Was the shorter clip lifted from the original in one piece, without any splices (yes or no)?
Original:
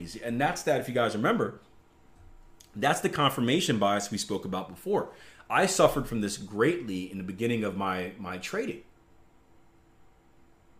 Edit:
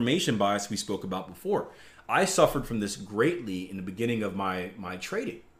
yes